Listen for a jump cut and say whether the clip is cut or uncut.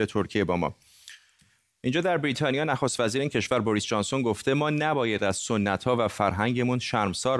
uncut